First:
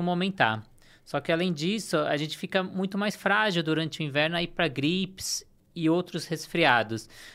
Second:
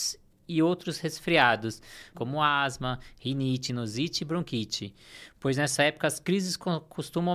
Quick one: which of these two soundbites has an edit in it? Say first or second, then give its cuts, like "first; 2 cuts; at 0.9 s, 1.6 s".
second; 2 cuts; at 2.1 s, 3.7 s